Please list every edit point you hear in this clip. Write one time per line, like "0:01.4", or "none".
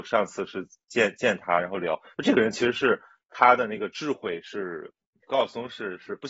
0:05.2